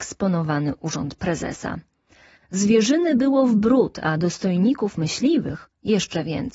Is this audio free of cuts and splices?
no; 1 cut; at 2.3 s

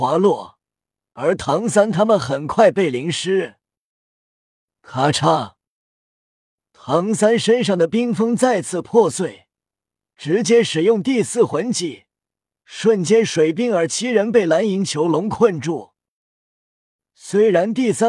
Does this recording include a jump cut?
no; 0 cuts

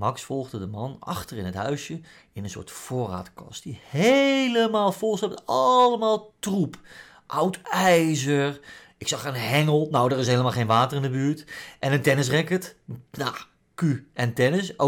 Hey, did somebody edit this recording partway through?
no; 0 cuts

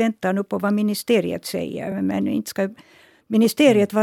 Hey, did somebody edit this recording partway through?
no; 0 cuts

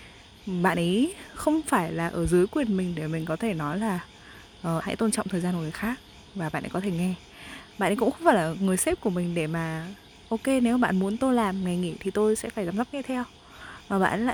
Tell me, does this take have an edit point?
yes; 1 cut; at 4.8 s

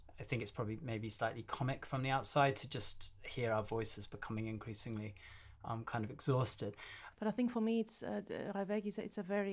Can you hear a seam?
yes; 1 cut; at 7.1 s

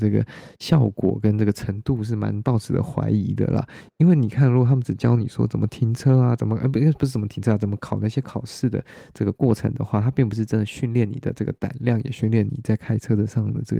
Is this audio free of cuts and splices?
yes; 0 cuts

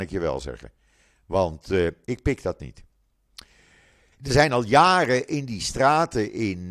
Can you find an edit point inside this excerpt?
yes; 2 cuts; at 2.0 s, 4.1 s

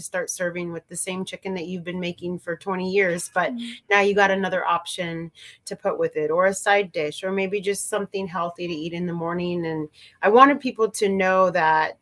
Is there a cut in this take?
no; 0 cuts

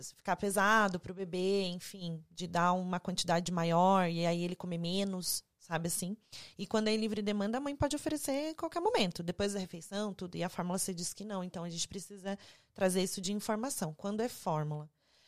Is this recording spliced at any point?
no; 0 cuts

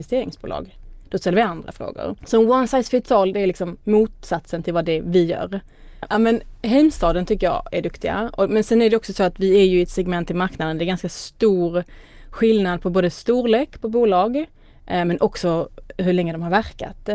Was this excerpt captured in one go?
no; 2 cuts; at 2.2 s, 6.1 s

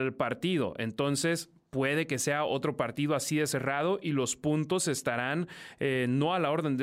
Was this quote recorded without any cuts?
yes; 0 cuts

